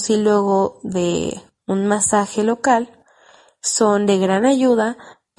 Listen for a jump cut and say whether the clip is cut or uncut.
uncut